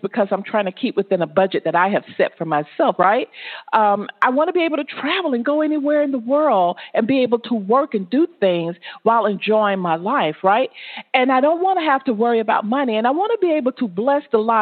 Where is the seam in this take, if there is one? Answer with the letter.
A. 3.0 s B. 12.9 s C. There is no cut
A